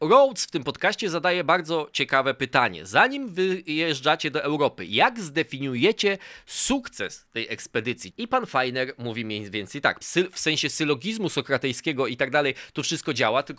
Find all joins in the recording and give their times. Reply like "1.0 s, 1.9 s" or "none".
8.1 s, 10.0 s